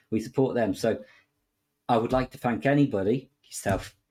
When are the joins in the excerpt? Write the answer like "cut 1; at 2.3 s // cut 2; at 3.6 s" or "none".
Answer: none